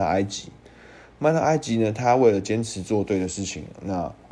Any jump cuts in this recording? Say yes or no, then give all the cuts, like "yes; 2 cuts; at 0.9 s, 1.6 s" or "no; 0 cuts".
no; 0 cuts